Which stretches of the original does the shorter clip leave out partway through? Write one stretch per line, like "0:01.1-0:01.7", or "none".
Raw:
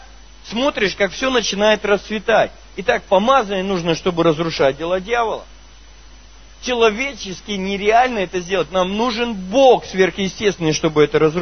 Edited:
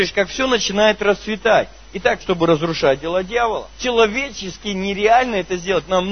0:03.0-0:04.0
0:05.5-0:06.6

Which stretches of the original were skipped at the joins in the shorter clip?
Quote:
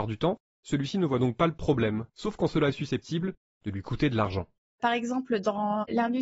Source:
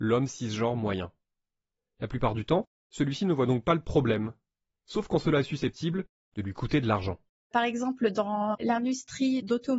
0:04.4-0:04.8

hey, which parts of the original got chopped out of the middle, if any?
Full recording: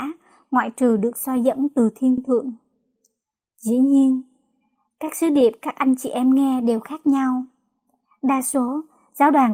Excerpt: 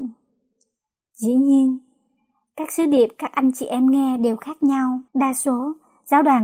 0:07.5-0:08.2

